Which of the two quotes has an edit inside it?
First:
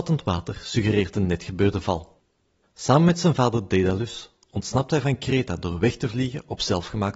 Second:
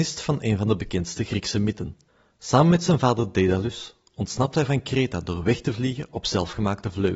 first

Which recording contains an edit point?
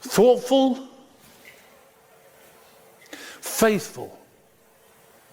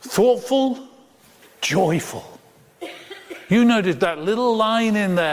second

